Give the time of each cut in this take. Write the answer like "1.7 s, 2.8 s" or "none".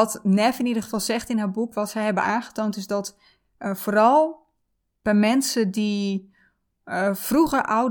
none